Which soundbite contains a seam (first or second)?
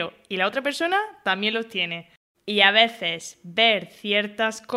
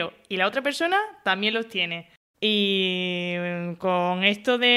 second